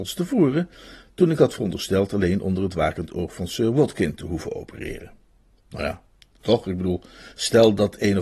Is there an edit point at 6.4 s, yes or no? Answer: yes